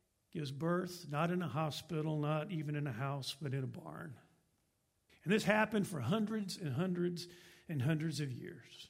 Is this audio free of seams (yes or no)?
no